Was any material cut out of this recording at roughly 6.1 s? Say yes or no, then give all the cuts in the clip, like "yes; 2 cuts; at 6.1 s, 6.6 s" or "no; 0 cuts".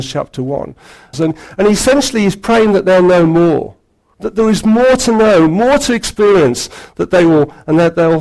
no; 2 cuts; at 1.1 s, 4.1 s